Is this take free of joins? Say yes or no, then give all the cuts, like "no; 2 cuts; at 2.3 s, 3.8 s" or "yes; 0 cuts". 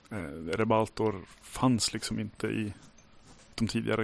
yes; 0 cuts